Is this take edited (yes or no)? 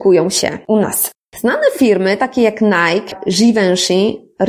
yes